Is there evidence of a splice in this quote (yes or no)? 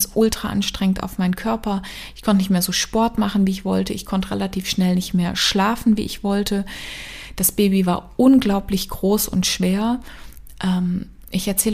no